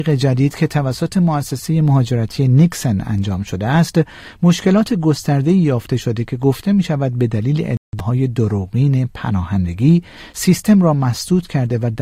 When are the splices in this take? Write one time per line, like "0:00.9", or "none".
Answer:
none